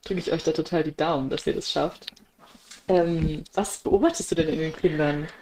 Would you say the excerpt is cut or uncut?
cut